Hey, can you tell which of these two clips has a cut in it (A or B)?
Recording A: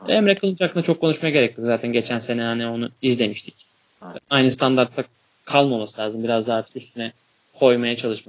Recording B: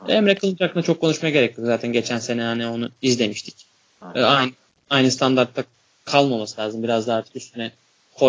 A